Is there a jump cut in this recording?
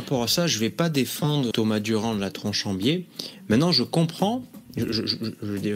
yes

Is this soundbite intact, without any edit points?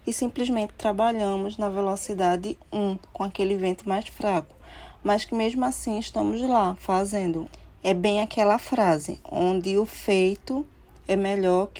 yes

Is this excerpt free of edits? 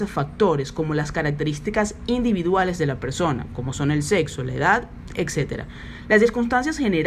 yes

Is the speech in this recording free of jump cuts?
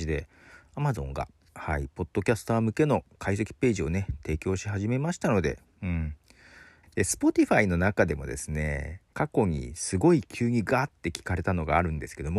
no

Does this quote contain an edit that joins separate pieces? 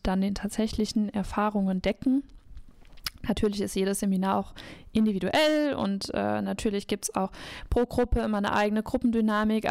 no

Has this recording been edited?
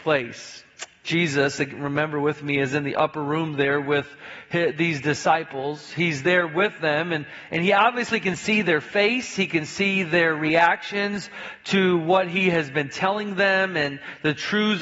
no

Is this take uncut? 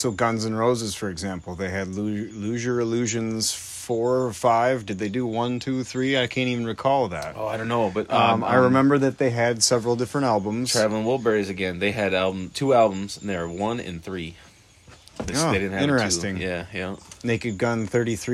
yes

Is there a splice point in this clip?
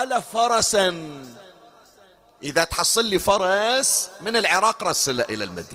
no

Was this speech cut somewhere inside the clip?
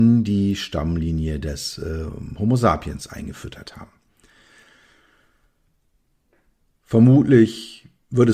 no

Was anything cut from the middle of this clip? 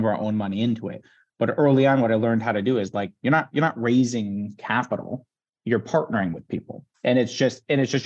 yes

